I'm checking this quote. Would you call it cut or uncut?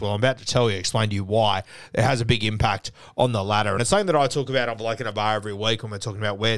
uncut